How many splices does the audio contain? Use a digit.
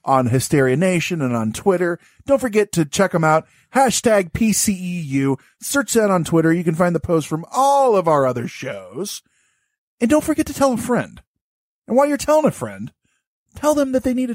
0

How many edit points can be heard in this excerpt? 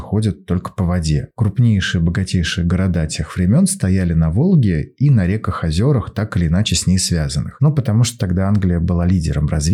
1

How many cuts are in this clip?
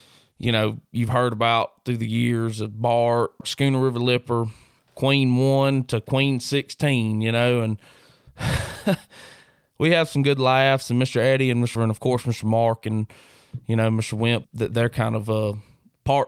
2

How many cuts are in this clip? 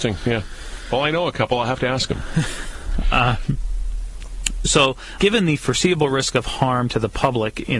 1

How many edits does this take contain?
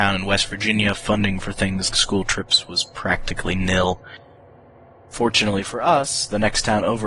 1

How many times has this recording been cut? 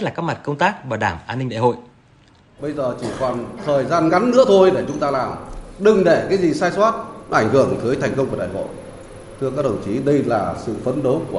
1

